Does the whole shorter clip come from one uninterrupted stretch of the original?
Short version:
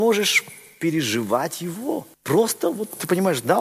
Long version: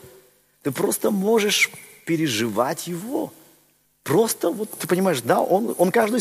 no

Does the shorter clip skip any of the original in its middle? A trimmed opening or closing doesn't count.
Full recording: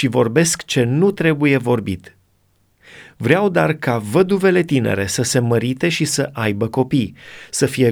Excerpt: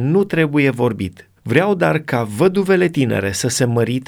yes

